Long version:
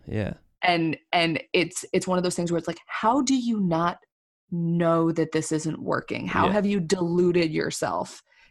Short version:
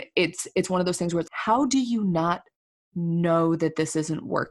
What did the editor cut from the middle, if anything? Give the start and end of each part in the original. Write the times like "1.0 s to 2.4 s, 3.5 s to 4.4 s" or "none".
2.7 s to 2.8 s